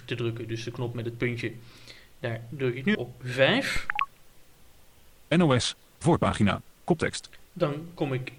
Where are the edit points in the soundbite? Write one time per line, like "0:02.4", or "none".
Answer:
0:02.9